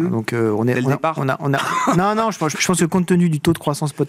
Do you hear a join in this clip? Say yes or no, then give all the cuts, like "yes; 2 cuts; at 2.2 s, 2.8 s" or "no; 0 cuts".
yes; 1 cut; at 2.5 s